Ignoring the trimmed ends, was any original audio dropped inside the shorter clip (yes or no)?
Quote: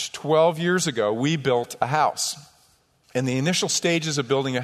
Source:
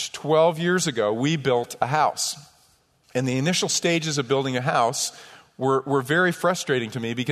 no